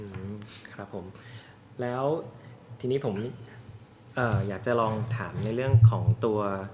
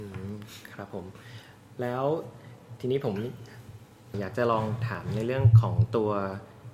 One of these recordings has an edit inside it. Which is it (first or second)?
second